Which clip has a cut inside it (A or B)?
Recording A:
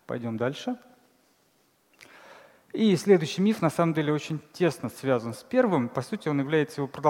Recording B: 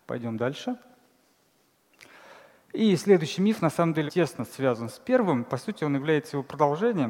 B